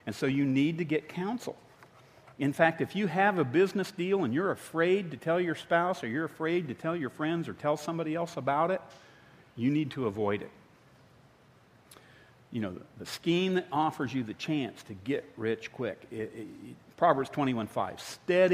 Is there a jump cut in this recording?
no; 0 cuts

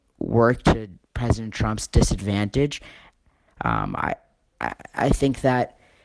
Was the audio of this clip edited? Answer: yes; 1 cut; at 3.5 s

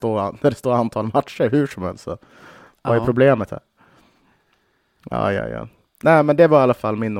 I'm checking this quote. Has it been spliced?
no; 0 cuts

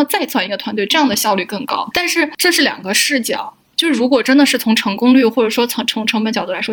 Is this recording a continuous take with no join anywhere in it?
no; 1 cut; at 1.9 s

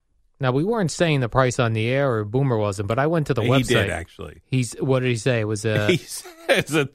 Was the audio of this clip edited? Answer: no; 0 cuts

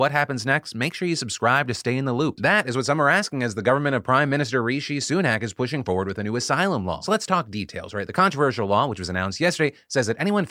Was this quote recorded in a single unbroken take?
no; 1 cut; at 2.4 s

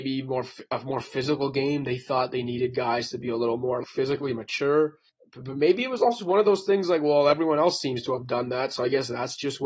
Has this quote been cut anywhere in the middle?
yes; 2 cuts; at 3.8 s, 6.2 s

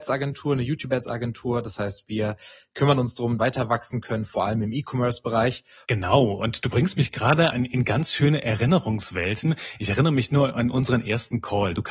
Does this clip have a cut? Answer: yes; 3 cuts; at 3.4 s, 5.8 s, 7.5 s

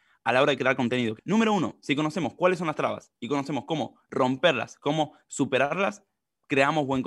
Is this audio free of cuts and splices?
no; 1 cut; at 1.2 s

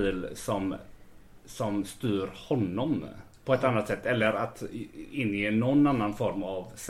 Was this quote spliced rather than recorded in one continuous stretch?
no; 0 cuts

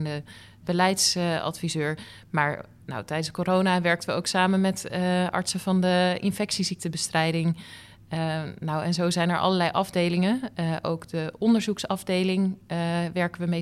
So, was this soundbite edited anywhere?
no; 0 cuts

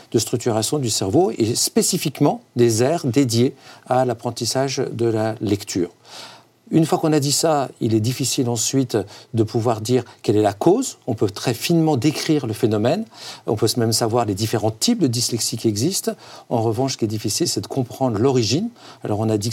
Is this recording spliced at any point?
no; 0 cuts

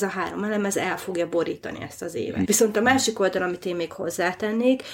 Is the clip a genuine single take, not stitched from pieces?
no; 1 cut; at 2.4 s

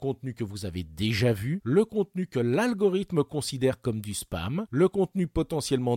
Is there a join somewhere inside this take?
no; 0 cuts

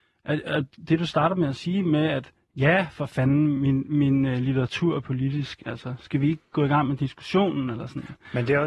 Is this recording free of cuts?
yes; 0 cuts

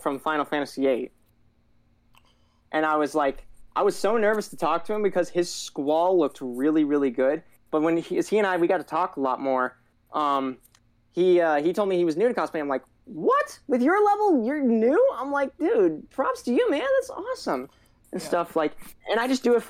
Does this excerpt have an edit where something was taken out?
no; 0 cuts

